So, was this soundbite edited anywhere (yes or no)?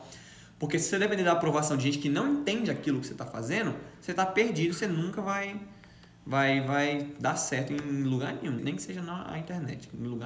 yes